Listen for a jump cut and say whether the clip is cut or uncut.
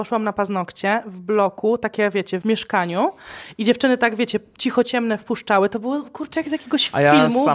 cut